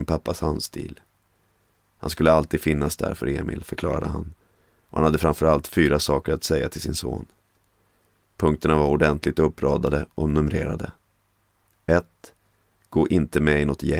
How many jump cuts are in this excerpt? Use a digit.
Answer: 0